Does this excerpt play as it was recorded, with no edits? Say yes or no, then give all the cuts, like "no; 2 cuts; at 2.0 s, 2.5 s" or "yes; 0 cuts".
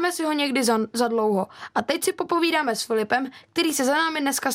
yes; 0 cuts